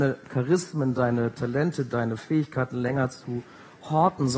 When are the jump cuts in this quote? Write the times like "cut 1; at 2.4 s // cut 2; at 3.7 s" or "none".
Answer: none

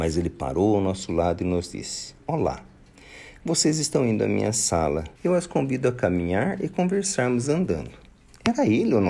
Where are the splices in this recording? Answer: cut 1; at 5.2 s

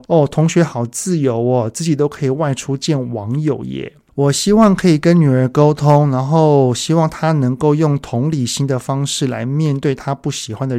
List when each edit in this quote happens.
none

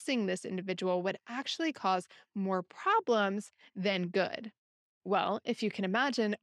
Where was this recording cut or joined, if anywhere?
none

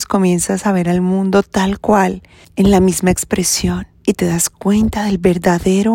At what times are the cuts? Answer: cut 1; at 2.4 s // cut 2; at 4.0 s

